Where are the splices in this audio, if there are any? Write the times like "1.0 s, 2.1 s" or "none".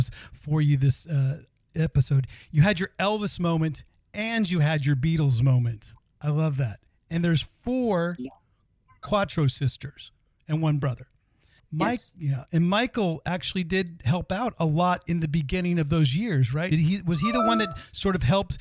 11.6 s, 16.7 s